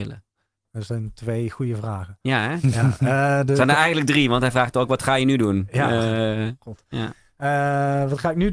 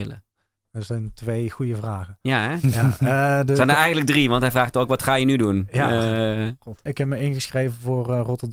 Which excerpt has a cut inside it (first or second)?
second